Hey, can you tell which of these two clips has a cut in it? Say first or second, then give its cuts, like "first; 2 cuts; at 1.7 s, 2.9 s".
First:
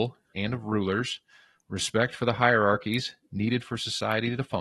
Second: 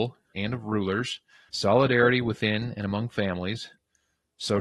second; 1 cut; at 1.5 s